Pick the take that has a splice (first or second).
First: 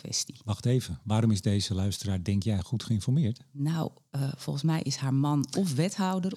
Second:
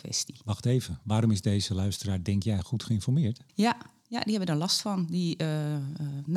second